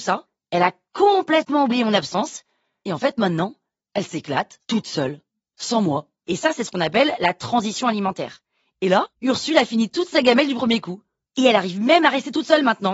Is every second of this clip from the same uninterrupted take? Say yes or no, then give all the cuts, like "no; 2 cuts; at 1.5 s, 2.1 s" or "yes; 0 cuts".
no; 2 cuts; at 6.2 s, 9.1 s